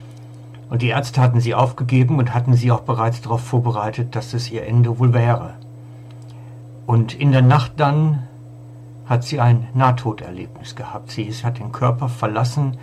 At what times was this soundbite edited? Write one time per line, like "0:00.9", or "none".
0:11.4